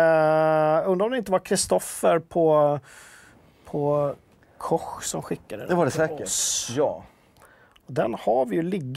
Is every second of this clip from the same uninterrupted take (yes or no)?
yes